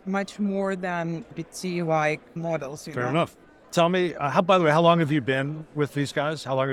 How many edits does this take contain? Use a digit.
0